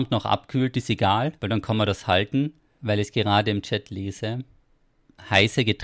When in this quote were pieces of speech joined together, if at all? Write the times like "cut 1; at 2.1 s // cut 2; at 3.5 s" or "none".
cut 1; at 1.4 s // cut 2; at 2.8 s